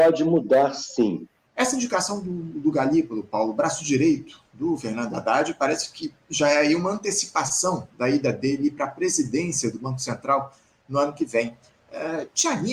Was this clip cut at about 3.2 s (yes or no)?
no